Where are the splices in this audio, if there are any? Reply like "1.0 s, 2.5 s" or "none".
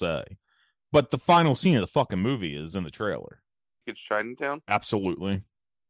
3.8 s